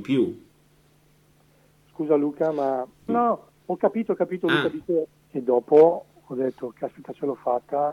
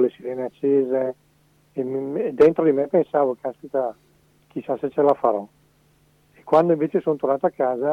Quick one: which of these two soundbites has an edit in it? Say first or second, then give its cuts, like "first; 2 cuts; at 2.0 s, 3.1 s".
first; 2 cuts; at 3.1 s, 5.3 s